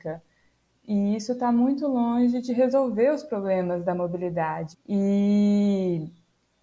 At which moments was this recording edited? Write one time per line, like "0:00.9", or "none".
0:04.7

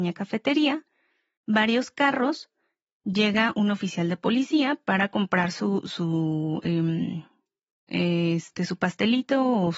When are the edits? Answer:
none

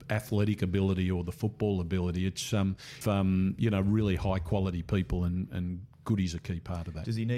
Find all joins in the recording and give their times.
0:03.0

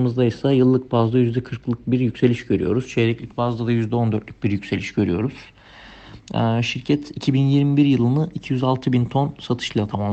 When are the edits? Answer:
none

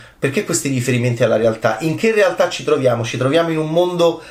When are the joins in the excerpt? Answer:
none

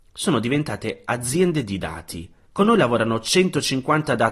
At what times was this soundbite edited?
0:02.4

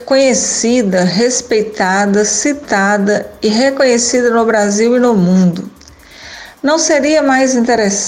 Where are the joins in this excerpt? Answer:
none

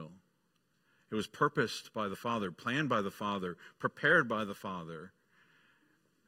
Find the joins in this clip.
none

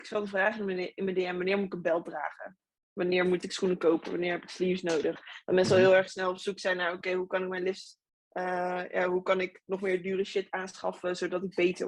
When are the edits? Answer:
none

